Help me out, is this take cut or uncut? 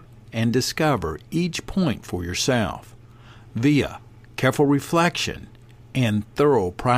uncut